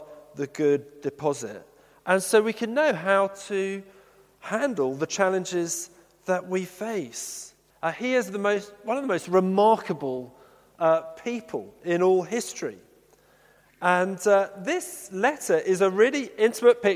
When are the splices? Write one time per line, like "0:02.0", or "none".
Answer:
0:07.7

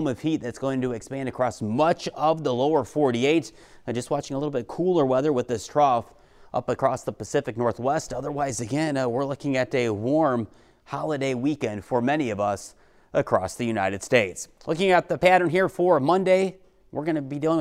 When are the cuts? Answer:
none

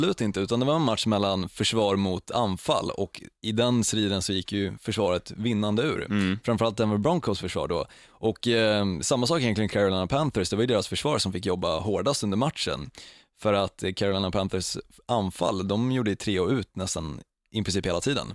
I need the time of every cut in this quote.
none

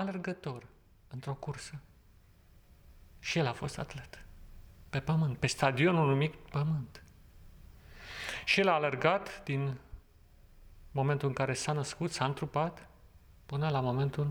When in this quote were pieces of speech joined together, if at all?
none

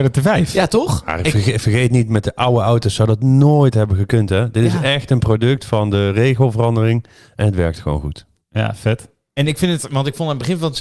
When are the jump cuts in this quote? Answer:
none

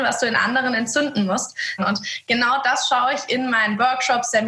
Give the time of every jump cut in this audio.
0:01.8

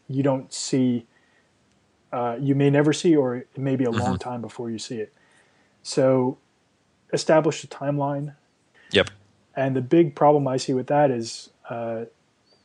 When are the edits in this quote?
0:08.7

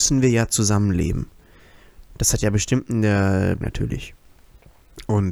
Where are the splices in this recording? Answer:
0:03.6

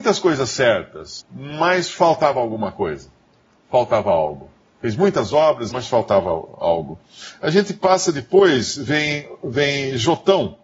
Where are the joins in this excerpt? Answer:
0:05.7

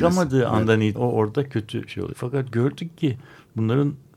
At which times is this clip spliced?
0:01.0
0:02.1

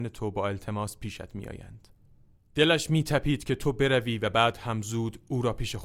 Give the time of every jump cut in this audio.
none

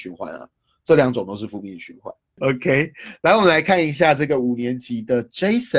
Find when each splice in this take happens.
0:02.4

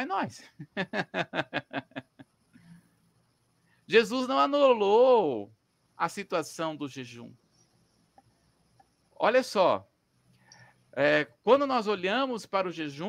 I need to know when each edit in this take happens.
none

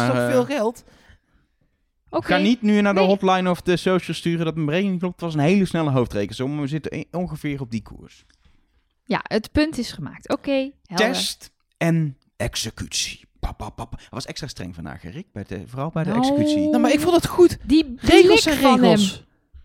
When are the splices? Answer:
none

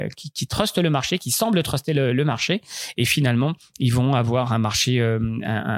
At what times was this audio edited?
0:02.9

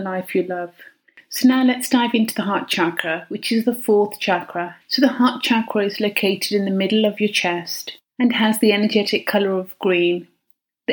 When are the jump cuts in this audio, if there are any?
0:04.8

